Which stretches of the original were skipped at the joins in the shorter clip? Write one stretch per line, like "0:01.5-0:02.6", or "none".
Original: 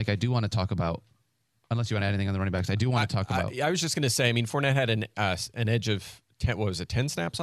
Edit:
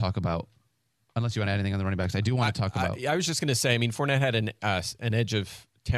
none